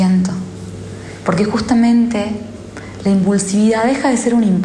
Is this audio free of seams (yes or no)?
yes